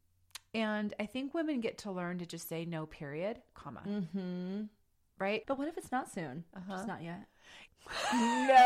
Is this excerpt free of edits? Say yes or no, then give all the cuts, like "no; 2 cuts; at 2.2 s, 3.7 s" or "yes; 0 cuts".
no; 3 cuts; at 3.5 s, 5.4 s, 7.7 s